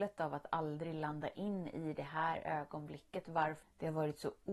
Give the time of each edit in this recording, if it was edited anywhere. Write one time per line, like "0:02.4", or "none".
0:03.6